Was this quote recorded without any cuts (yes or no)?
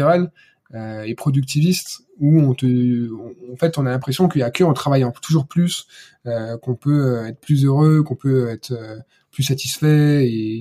yes